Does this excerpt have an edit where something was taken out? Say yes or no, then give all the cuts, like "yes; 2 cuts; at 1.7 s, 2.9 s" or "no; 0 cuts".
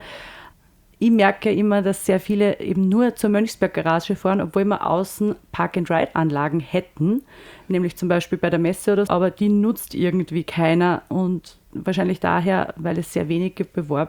yes; 1 cut; at 9.1 s